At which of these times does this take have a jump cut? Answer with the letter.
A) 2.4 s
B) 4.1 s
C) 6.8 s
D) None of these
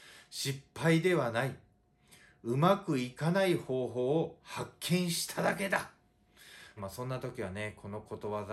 C